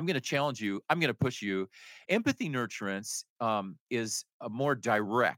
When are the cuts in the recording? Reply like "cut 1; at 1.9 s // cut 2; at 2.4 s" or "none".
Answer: cut 1; at 2.1 s